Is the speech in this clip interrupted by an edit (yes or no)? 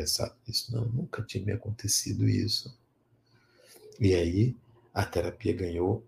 no